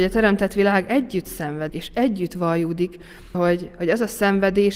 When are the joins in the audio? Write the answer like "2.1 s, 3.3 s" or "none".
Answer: 1.7 s, 3.3 s